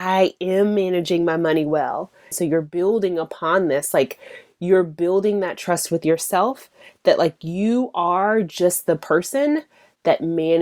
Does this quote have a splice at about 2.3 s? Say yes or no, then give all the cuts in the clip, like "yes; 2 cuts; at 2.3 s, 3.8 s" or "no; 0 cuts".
yes; 1 cut; at 2.3 s